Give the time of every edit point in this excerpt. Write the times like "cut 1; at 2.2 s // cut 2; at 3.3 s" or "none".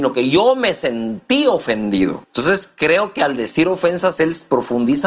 cut 1; at 2.2 s